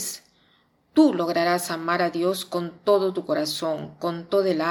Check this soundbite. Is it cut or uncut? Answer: uncut